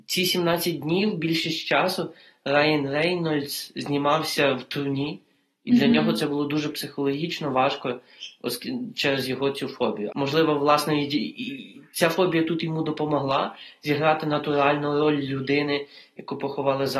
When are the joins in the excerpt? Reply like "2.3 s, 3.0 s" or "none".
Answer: 10.1 s